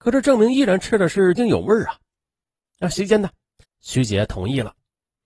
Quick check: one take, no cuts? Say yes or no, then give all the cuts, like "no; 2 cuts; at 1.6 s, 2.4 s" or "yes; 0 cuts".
no; 2 cuts; at 1.4 s, 3.6 s